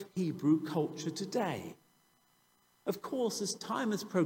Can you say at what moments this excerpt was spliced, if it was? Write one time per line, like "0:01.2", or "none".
none